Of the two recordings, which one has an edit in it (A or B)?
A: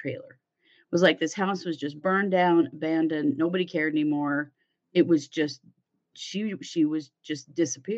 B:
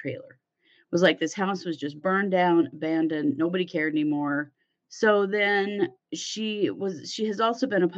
B